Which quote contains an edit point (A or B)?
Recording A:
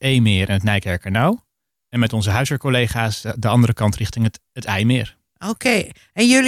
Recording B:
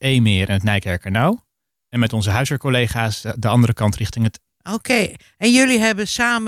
B